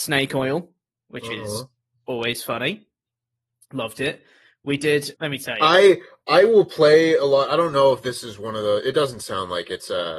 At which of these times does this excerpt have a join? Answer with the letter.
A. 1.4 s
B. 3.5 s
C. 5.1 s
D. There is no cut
C